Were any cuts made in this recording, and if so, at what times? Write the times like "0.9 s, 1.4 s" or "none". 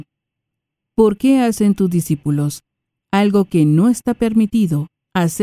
none